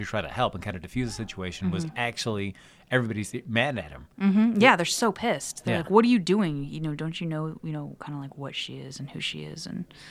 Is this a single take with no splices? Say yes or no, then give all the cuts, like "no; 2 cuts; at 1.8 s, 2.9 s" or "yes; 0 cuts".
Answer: yes; 0 cuts